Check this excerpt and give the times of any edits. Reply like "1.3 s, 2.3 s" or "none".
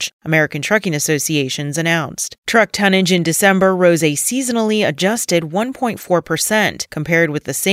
2.4 s

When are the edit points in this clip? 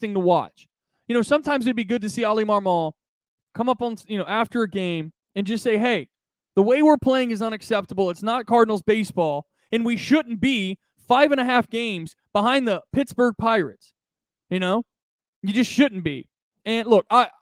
none

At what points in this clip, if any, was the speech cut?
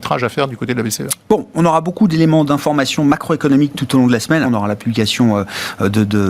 4.4 s

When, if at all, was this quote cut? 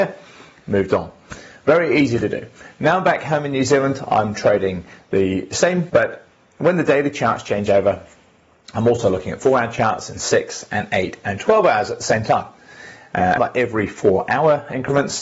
5.9 s, 13.4 s

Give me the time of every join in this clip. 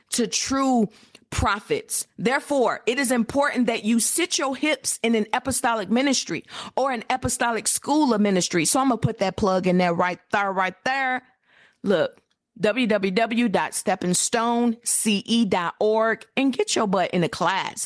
none

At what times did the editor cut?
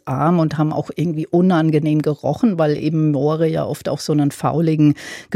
none

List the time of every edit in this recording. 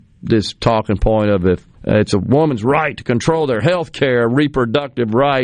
1.7 s

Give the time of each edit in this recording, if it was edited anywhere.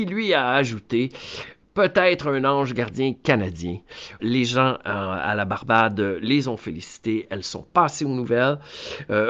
4.2 s

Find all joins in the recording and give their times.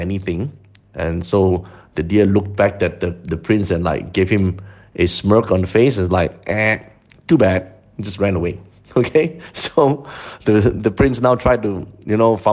none

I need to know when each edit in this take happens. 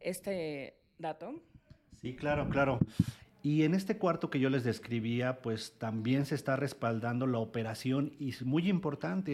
3.2 s

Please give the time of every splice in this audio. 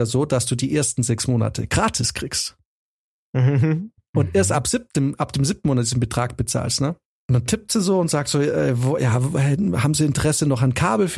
7.1 s

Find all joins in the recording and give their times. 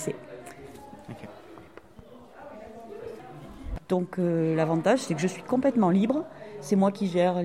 3.8 s

